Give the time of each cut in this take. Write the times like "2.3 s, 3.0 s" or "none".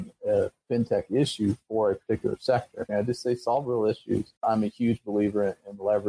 2.9 s, 4.4 s